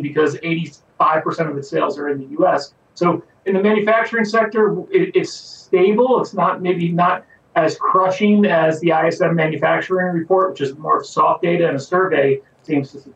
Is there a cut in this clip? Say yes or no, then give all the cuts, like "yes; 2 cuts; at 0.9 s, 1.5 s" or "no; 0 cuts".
no; 0 cuts